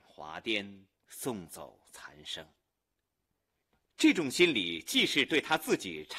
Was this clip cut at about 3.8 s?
no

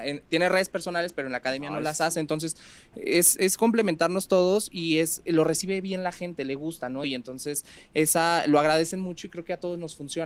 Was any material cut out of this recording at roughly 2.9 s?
no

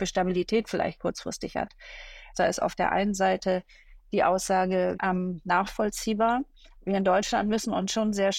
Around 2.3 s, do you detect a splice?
yes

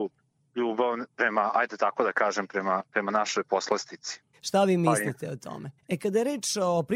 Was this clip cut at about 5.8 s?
yes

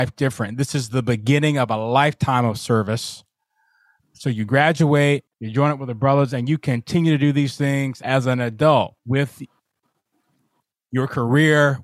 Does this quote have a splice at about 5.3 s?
yes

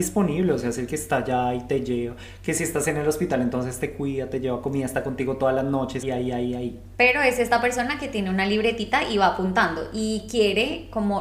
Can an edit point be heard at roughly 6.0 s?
yes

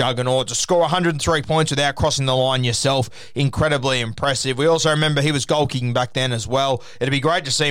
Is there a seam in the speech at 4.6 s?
no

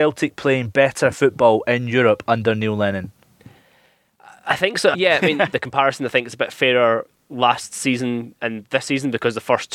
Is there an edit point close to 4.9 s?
yes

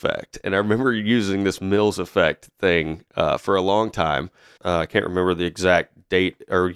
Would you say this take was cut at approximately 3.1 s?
no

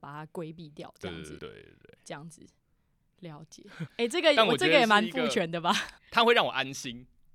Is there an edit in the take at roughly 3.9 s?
yes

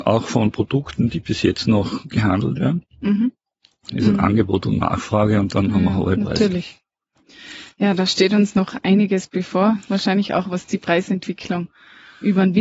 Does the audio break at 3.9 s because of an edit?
yes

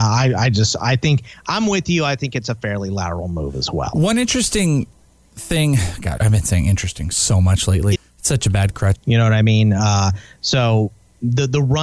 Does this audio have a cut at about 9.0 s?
yes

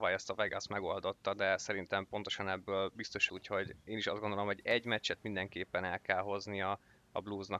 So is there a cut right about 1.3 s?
no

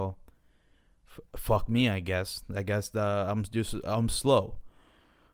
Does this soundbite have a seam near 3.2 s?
no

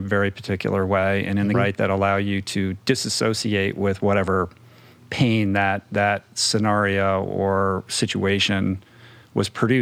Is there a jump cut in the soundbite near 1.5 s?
yes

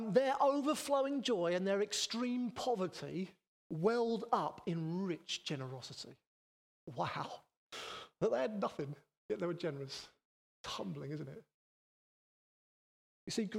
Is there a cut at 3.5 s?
yes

